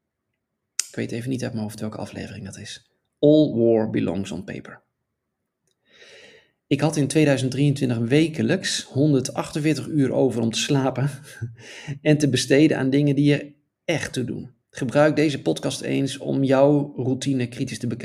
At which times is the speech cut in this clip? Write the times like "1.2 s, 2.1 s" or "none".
14.6 s